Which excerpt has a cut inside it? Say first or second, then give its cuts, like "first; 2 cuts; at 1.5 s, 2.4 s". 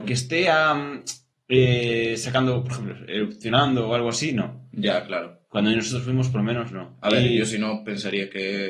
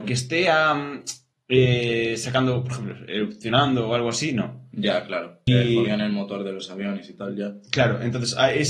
second; 1 cut; at 5.5 s